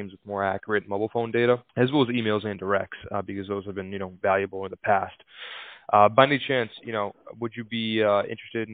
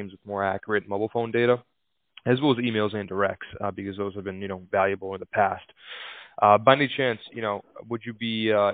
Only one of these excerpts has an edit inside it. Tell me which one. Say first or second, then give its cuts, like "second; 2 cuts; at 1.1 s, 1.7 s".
first; 1 cut; at 1.7 s